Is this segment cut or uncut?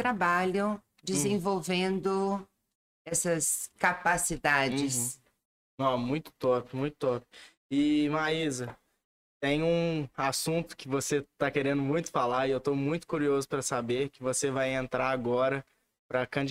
uncut